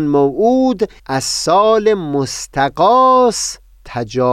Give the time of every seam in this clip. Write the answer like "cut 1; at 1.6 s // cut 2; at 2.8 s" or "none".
cut 1; at 1.0 s